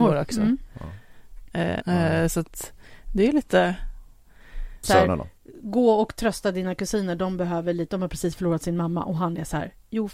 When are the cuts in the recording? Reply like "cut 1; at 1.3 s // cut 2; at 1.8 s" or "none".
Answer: cut 1; at 1.8 s // cut 2; at 4.8 s